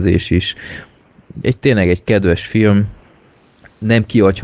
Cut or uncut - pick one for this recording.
cut